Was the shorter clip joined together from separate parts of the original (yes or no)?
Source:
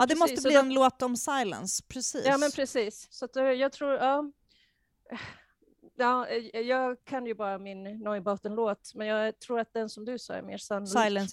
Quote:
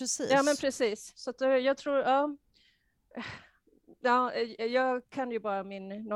no